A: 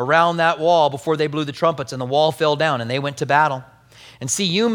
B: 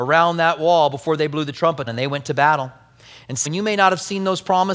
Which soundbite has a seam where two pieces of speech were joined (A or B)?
B